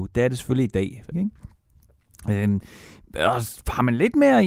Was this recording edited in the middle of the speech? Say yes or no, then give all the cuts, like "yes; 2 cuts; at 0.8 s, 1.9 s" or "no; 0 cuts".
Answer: yes; 1 cut; at 1.1 s